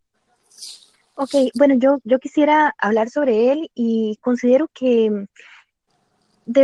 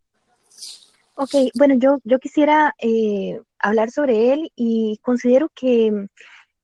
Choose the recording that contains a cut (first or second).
first